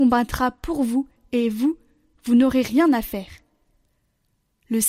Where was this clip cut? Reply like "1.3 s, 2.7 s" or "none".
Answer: none

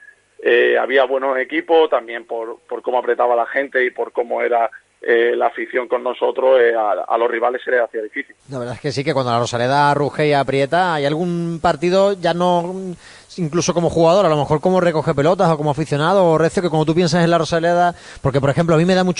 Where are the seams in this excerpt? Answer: 8.4 s

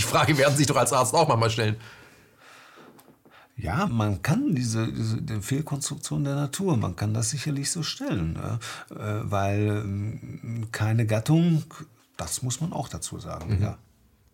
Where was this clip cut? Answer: 3.9 s, 12.0 s

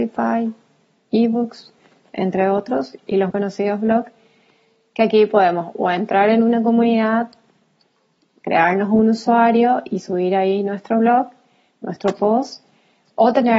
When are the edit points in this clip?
3.3 s

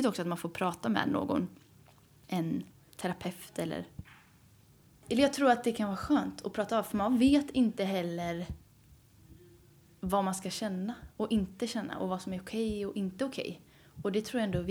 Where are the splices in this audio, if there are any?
none

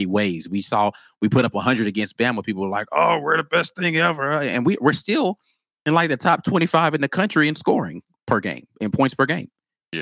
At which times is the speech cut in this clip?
none

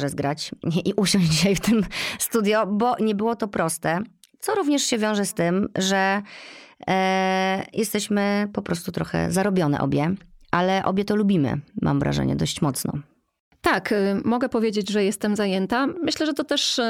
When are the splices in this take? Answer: none

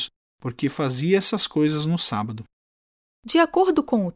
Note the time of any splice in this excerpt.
3.1 s

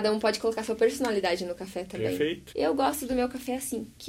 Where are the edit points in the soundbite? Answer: 2.5 s

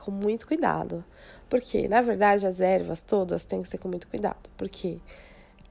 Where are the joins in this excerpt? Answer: none

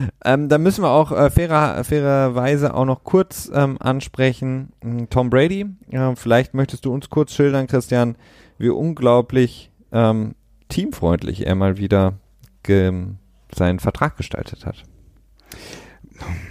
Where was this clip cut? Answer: none

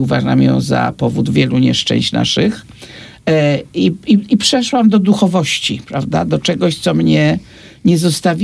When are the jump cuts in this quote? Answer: none

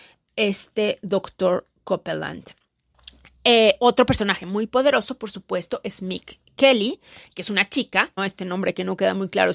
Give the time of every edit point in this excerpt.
8.2 s

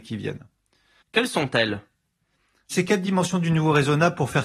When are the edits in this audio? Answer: 1.0 s

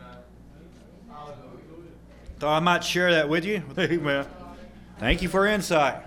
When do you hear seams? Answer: 3.7 s, 5.0 s

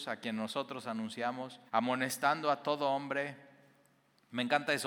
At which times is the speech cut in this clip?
1.7 s

